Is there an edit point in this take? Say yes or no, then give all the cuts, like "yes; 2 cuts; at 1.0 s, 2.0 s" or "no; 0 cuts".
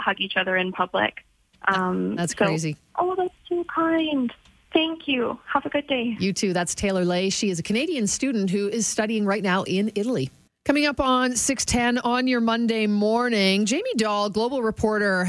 yes; 1 cut; at 2.9 s